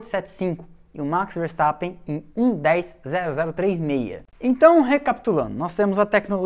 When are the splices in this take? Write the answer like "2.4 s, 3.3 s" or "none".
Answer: 4.3 s